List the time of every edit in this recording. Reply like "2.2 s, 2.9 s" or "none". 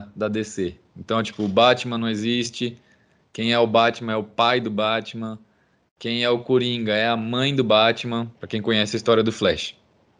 8.3 s